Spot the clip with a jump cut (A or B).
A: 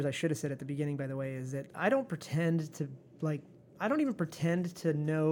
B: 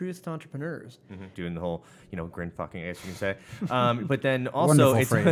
B